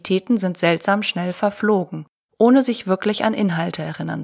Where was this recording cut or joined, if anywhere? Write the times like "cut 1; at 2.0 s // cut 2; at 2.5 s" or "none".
cut 1; at 2.3 s